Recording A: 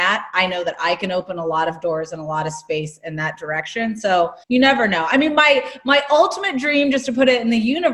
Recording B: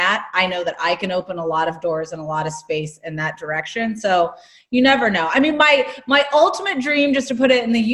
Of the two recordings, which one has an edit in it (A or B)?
A